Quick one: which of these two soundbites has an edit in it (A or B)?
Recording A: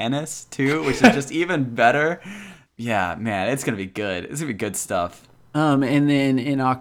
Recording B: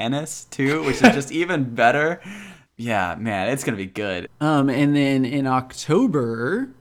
B